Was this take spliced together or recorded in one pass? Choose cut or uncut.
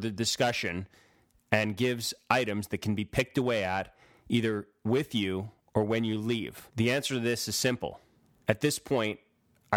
cut